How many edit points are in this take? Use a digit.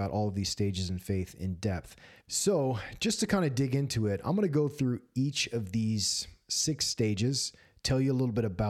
1